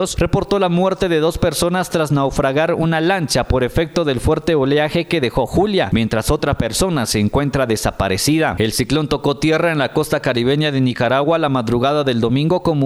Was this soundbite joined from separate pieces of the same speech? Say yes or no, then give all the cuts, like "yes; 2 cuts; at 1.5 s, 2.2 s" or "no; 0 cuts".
no; 0 cuts